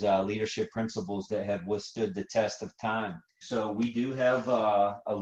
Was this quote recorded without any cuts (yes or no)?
no